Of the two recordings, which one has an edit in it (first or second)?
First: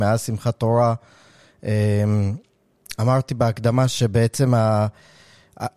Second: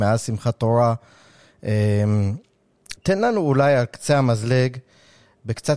second